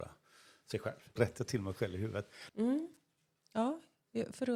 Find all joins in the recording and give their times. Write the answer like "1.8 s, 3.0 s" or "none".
1.2 s, 2.5 s